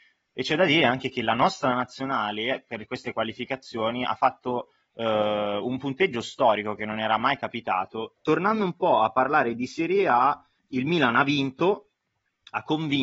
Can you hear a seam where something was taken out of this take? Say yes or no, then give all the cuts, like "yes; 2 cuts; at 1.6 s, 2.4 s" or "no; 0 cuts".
yes; 2 cuts; at 8.2 s, 10.6 s